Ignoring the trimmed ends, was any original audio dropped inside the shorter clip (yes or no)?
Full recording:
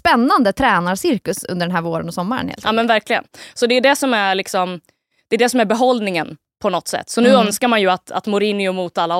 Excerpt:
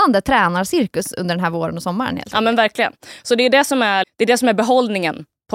yes